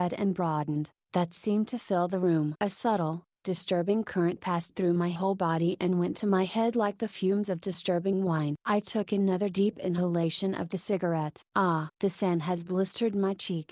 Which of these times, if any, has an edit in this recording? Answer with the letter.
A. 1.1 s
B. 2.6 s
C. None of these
B